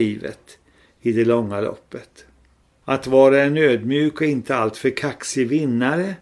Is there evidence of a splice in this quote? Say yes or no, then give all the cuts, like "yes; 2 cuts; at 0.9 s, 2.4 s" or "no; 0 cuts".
yes; 1 cut; at 2.8 s